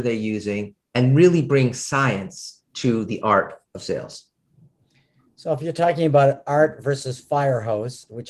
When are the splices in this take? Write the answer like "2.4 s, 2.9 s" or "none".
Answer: none